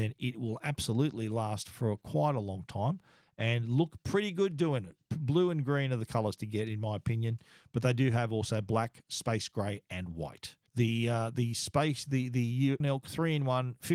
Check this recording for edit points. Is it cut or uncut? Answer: cut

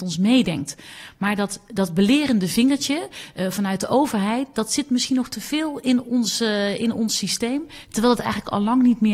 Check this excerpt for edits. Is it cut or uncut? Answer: uncut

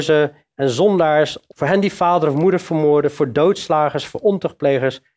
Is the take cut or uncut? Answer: cut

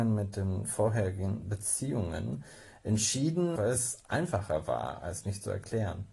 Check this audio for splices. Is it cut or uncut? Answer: cut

